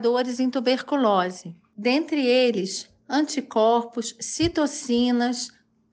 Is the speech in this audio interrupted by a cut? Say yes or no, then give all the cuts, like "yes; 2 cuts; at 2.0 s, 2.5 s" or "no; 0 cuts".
no; 0 cuts